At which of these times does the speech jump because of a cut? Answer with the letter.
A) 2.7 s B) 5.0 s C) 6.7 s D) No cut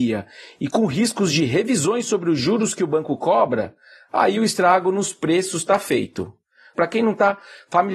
C